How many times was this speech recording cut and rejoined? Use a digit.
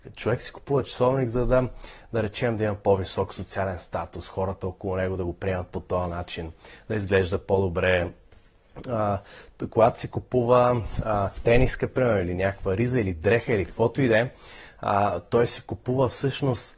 0